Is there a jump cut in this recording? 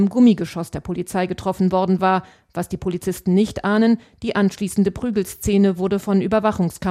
no; 0 cuts

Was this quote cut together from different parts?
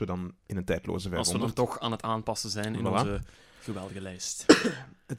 no; 0 cuts

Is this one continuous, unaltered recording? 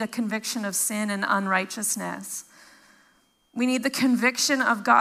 no; 1 cut; at 3.4 s

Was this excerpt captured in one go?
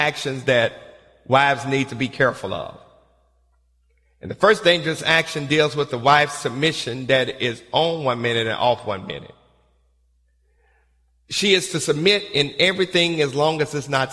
yes; 0 cuts

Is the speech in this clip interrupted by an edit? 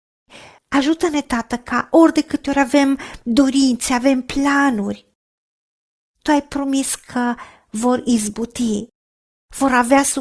no; 0 cuts

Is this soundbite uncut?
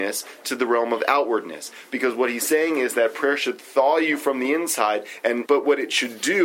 no; 1 cut; at 5.5 s

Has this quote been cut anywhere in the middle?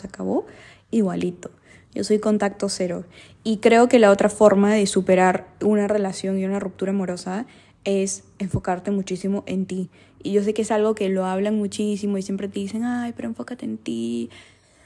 no; 0 cuts

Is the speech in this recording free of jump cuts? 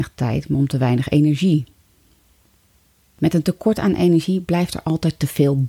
yes; 0 cuts

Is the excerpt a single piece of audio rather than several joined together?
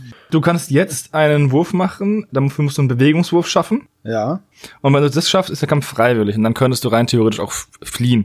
no; 1 cut; at 2.3 s

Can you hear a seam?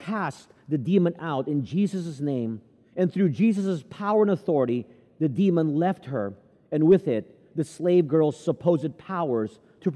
no; 0 cuts

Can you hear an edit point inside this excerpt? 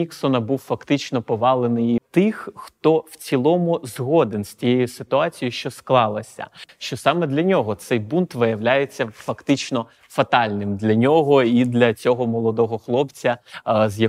yes; 2 cuts; at 2.0 s, 6.7 s

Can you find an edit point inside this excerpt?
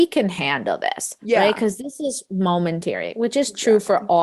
no; 0 cuts

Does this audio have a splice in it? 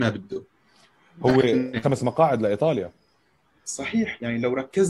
yes; 1 cut; at 1.8 s

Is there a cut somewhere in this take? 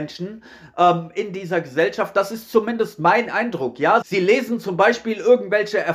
yes; 1 cut; at 4.0 s

